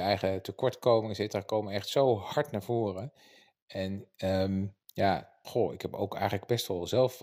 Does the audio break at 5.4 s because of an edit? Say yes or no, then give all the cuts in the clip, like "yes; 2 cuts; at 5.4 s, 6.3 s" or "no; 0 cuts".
yes; 1 cut; at 5.4 s